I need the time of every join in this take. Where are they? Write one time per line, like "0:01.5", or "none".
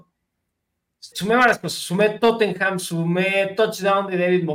0:01.1